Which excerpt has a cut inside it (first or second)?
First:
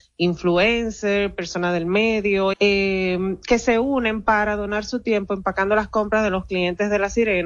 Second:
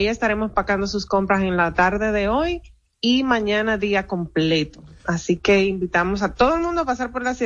first